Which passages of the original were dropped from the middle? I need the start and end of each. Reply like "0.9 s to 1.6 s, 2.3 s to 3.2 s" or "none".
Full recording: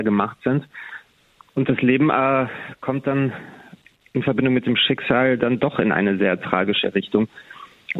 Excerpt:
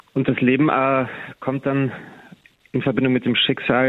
none